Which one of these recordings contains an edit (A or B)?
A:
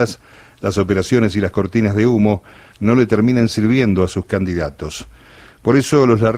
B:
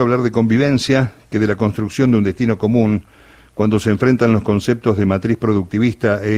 A